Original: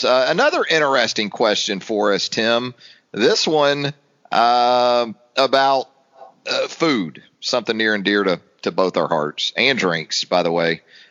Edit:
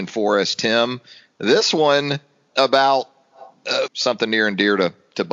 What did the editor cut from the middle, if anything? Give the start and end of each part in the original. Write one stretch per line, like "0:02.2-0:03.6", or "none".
0:04.2-0:05.3
0:06.7-0:07.3